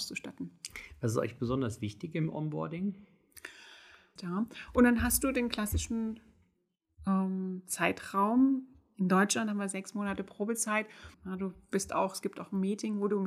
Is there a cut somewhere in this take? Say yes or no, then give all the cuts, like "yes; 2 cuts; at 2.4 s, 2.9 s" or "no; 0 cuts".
yes; 2 cuts; at 4.2 s, 11.1 s